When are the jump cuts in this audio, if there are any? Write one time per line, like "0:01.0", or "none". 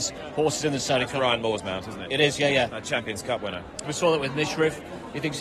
0:02.7
0:03.8